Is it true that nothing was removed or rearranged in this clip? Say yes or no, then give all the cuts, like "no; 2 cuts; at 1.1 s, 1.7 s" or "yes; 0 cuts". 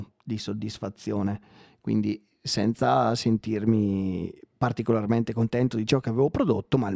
yes; 0 cuts